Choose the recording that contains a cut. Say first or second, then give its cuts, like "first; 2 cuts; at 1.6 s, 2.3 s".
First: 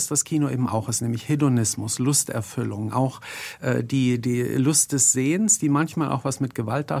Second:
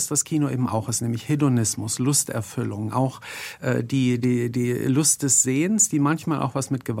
first; 1 cut; at 4.2 s